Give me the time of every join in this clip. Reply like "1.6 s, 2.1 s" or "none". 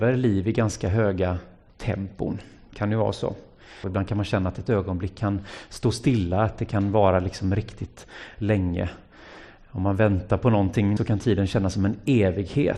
3.8 s, 11.0 s